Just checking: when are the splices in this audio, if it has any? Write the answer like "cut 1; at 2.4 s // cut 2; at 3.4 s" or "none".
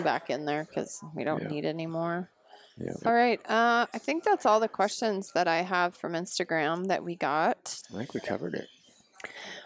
cut 1; at 3.0 s // cut 2; at 7.8 s